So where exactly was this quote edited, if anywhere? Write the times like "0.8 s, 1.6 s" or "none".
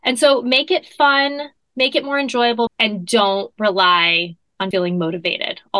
2.7 s, 4.7 s